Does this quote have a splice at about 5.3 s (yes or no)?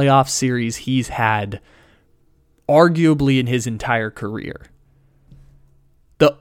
no